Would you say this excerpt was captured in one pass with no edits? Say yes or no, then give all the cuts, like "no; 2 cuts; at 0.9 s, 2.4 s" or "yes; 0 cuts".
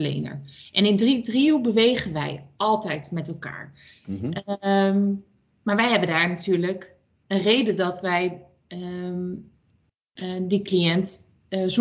yes; 0 cuts